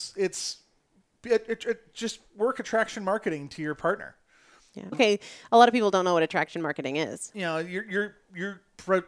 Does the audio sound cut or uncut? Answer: cut